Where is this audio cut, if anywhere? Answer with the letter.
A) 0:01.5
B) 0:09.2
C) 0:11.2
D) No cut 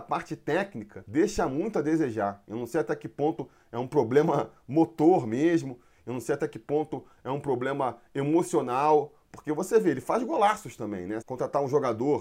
C